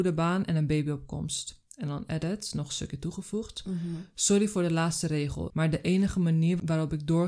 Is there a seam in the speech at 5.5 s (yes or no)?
yes